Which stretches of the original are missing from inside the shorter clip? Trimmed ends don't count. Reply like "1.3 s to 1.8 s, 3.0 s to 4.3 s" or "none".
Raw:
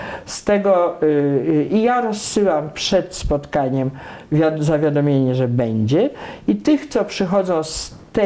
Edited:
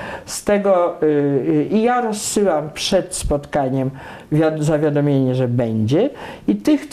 none